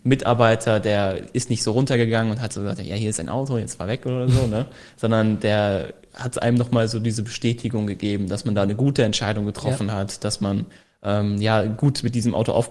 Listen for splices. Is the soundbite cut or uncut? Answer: uncut